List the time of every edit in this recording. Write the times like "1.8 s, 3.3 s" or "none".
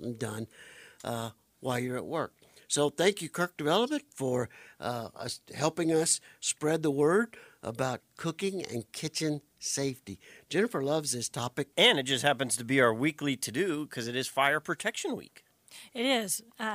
11.7 s